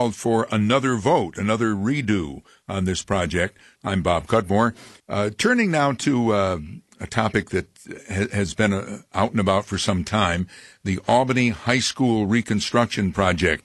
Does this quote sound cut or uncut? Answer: cut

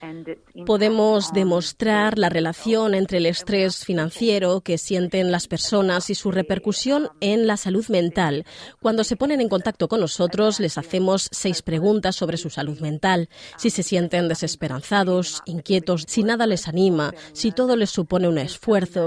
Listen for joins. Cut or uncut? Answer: cut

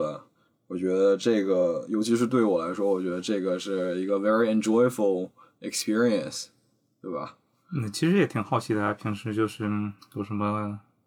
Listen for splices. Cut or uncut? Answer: uncut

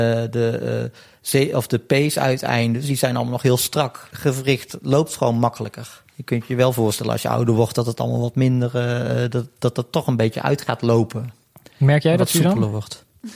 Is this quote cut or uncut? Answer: cut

